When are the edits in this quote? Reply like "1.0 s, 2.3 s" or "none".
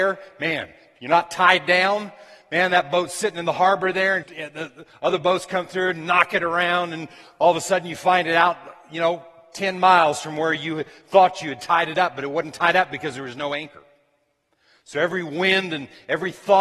4.2 s

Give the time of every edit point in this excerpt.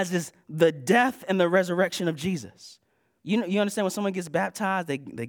3.2 s

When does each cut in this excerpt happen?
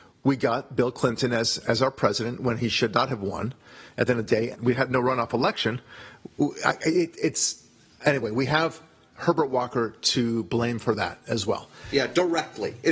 4.5 s

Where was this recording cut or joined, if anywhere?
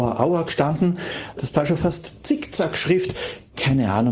1.4 s

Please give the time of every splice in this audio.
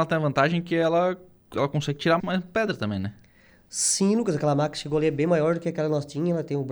2.2 s

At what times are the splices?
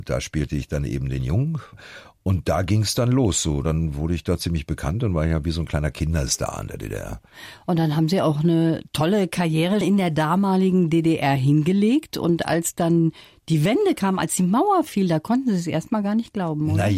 9.8 s

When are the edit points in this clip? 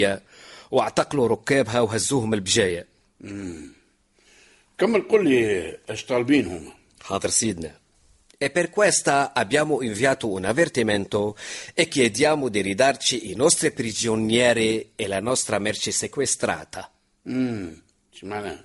none

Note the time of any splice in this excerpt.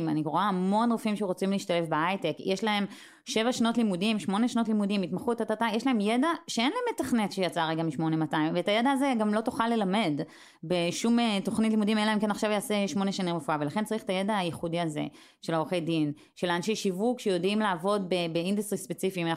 none

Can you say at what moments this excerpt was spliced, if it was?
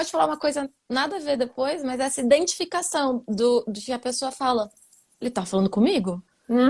none

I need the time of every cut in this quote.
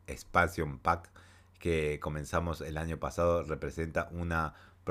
none

